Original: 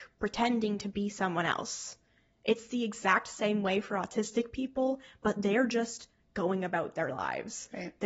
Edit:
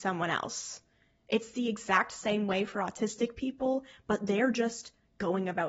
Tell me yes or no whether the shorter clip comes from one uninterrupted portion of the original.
yes